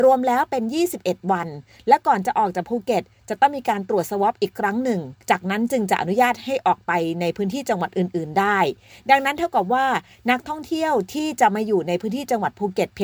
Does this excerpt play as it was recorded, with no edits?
no; 1 cut; at 5.2 s

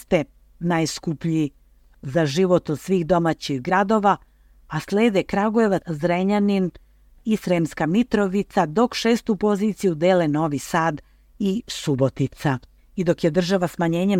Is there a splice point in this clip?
yes; 2 cuts; at 5.8 s, 12.8 s

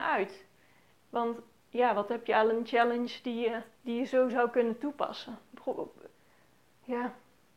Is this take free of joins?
no; 2 cuts; at 0.9 s, 3.7 s

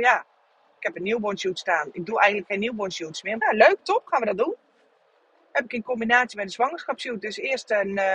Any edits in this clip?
yes; 1 cut; at 3.4 s

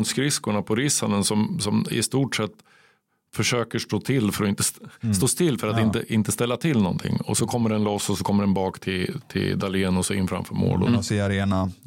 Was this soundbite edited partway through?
yes; 1 cut; at 10.9 s

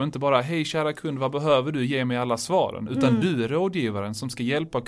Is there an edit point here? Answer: no; 0 cuts

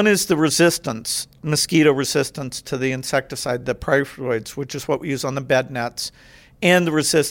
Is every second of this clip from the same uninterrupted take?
yes; 0 cuts

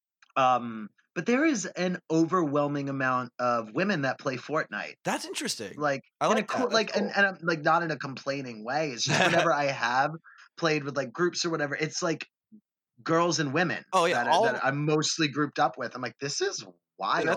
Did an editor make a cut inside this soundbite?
no; 0 cuts

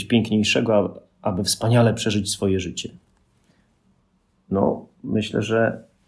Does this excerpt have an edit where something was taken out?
no; 0 cuts

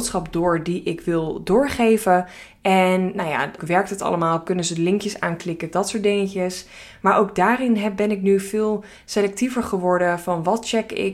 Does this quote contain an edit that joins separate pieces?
yes; 2 cuts; at 3.6 s, 5.7 s

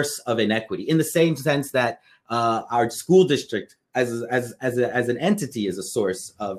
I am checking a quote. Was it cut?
no; 0 cuts

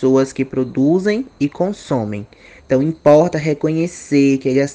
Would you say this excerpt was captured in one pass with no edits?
no; 1 cut; at 2.6 s

